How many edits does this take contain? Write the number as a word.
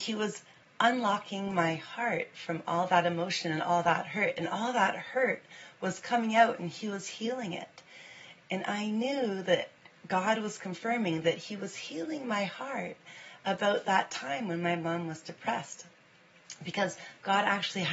one